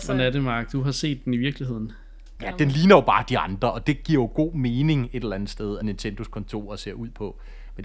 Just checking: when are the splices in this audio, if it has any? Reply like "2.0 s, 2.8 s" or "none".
2.4 s, 5.8 s